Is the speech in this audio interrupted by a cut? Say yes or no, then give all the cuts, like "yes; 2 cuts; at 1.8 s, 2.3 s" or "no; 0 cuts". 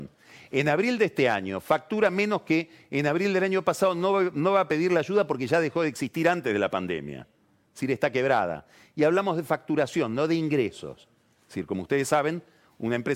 no; 0 cuts